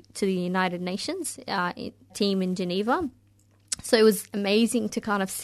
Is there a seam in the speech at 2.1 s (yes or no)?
yes